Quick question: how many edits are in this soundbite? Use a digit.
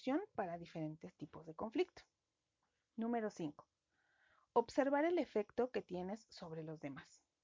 0